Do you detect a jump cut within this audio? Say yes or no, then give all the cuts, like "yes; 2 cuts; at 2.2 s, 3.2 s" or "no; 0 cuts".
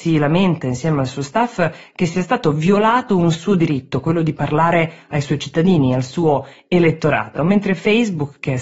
no; 0 cuts